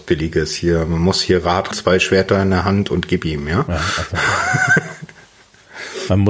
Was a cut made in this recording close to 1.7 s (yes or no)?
yes